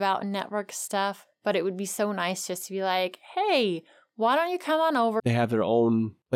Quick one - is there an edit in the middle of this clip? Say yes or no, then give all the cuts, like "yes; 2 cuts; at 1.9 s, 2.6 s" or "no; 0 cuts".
yes; 1 cut; at 5.2 s